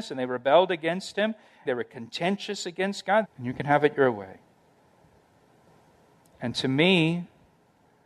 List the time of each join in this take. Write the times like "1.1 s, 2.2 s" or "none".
1.7 s, 3.2 s